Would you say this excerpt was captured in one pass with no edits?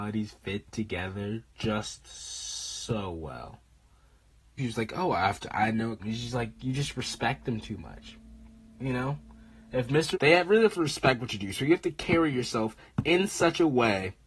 no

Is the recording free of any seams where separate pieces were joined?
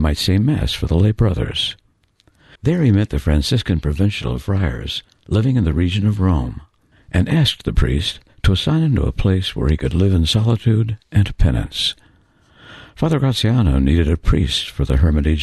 no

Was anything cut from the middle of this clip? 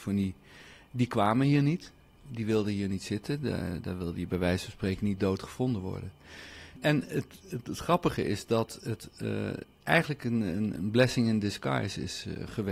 yes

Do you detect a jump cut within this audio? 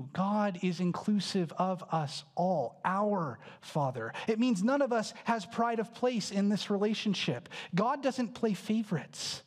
no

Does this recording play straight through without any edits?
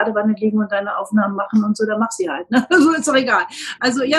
yes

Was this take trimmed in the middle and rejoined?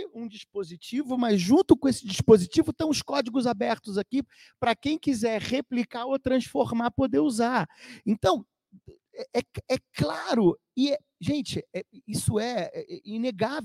no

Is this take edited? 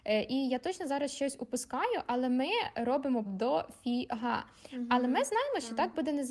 yes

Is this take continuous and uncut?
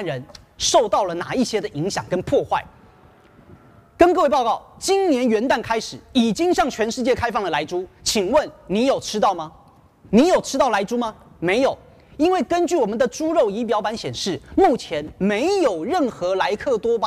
yes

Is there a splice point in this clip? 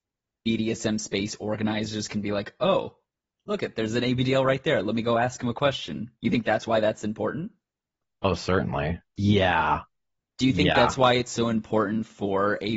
yes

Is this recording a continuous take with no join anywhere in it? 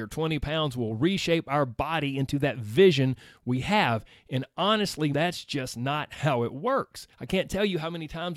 no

